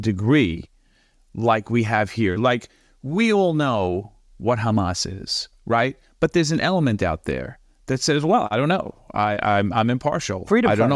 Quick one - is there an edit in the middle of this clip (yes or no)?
no